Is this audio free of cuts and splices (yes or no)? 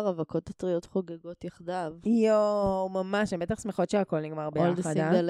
yes